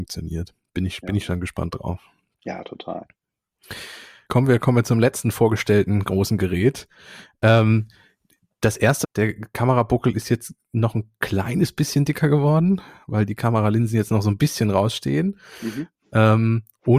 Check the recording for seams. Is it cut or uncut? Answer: cut